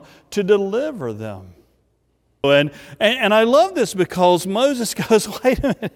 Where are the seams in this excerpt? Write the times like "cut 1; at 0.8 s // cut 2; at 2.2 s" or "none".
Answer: cut 1; at 2.4 s